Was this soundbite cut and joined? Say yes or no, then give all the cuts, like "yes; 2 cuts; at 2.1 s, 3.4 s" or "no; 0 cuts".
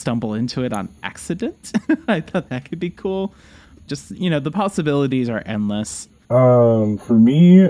yes; 2 cuts; at 3.9 s, 6.2 s